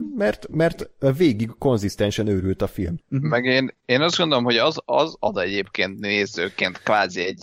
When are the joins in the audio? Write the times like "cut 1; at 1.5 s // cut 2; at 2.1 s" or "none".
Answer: cut 1; at 3.0 s